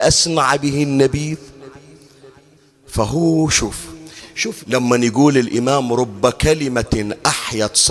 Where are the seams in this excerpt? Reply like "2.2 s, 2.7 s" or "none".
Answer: 4.6 s